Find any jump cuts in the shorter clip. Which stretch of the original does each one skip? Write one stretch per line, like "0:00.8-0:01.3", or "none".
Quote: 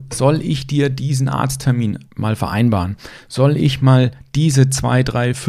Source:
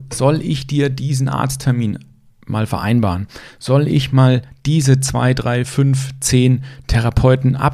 0:02.0-0:02.4